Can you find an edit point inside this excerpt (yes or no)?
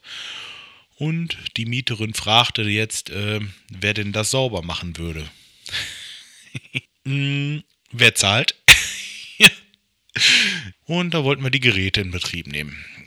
yes